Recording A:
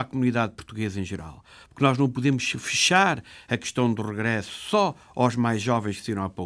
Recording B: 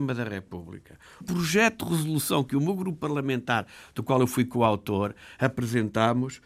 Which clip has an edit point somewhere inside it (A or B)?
B